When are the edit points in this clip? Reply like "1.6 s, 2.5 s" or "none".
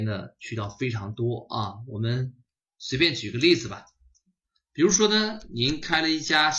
none

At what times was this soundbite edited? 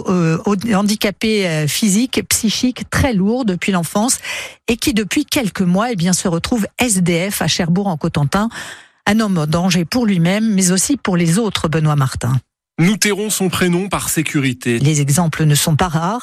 14.8 s

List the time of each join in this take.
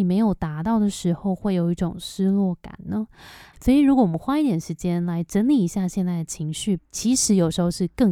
3.5 s, 6.8 s

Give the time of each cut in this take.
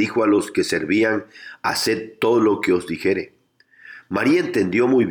none

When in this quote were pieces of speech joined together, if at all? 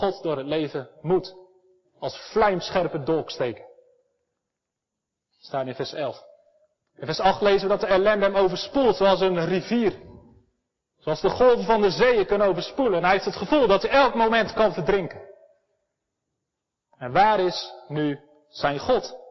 1.8 s

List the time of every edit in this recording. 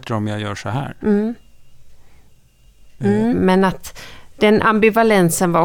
3.3 s

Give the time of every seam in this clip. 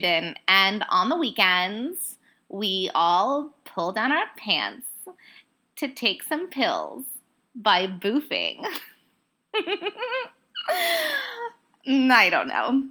none

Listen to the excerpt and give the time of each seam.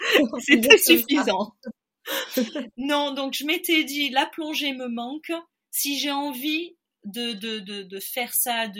none

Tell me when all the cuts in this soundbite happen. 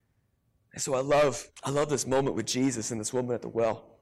1.6 s

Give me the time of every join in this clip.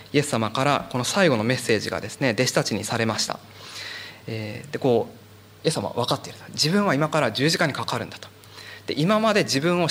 4.2 s

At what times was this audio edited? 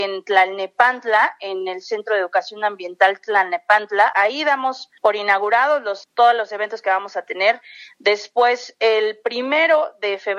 4.1 s

